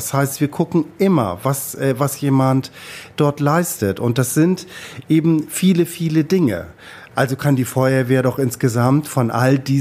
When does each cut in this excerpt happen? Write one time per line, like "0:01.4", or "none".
0:07.1